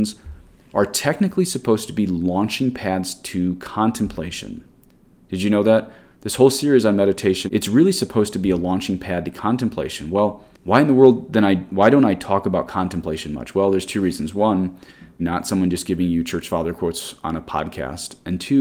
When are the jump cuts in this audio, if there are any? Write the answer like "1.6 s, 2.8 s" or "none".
7.5 s, 10.5 s, 15.2 s